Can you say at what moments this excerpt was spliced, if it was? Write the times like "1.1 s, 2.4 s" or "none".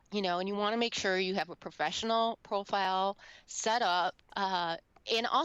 4.3 s